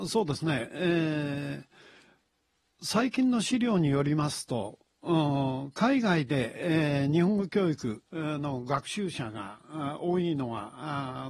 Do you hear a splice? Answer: yes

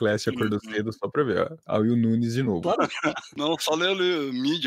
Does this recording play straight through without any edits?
no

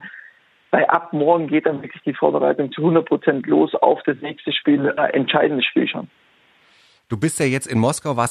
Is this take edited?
yes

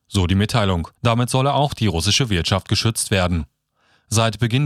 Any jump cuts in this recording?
yes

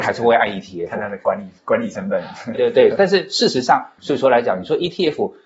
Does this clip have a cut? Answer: yes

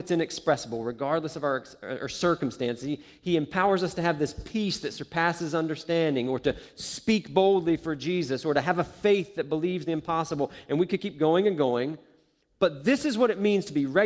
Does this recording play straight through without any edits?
yes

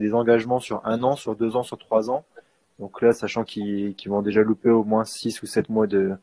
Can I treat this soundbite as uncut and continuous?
yes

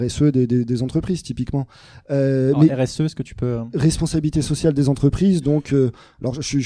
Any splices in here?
no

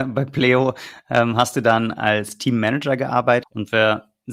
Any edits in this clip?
yes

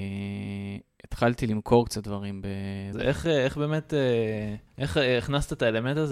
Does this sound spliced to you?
yes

